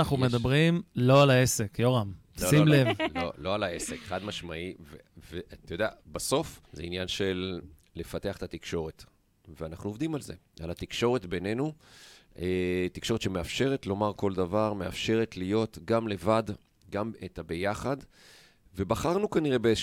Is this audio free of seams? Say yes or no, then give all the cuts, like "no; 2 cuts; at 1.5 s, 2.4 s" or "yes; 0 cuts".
no; 1 cut; at 6.7 s